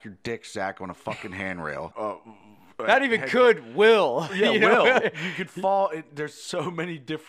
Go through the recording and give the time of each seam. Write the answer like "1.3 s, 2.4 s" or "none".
1.9 s, 5.0 s